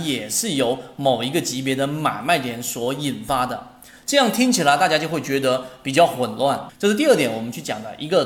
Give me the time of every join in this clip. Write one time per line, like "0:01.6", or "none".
0:06.7